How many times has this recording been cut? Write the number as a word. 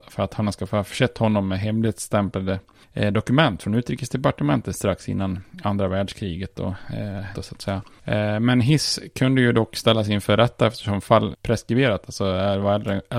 two